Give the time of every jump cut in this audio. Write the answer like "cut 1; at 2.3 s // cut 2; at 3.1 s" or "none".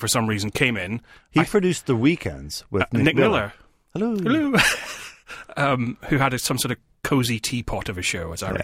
none